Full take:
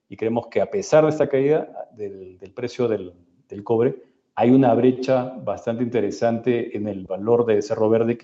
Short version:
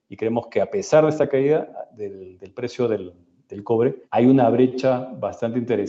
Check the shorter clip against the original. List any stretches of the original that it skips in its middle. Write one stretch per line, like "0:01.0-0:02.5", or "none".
0:04.0-0:04.3